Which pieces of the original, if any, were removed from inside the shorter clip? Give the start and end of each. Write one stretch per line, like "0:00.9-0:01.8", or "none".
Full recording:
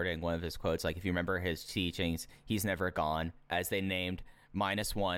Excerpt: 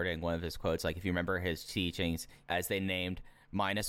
0:02.4-0:03.4